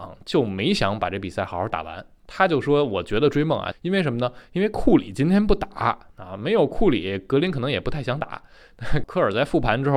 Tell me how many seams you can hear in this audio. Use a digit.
2